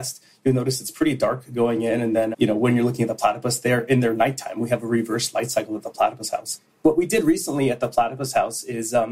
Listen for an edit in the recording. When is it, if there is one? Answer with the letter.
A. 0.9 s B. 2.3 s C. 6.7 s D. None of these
B